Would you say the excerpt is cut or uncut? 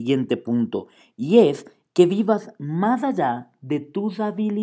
uncut